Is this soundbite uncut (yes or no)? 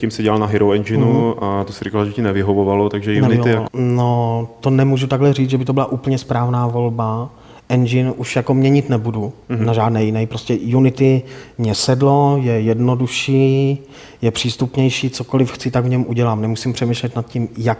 no